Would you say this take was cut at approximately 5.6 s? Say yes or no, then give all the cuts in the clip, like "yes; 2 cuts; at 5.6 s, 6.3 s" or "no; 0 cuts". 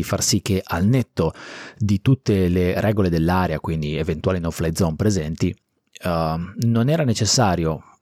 no; 0 cuts